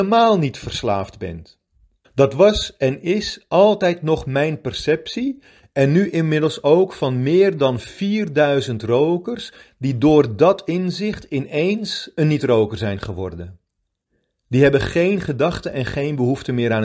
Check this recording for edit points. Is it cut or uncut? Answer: cut